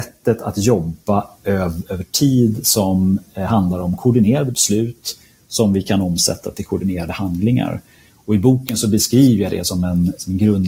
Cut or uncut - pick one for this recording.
uncut